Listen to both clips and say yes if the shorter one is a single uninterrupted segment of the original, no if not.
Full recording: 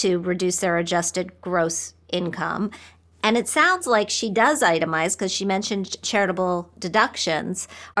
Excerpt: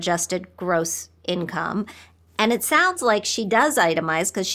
yes